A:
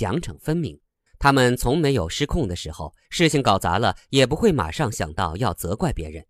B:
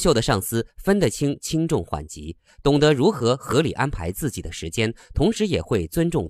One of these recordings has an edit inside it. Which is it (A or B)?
A